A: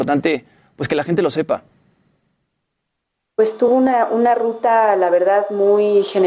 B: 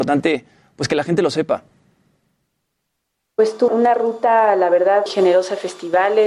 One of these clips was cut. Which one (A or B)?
B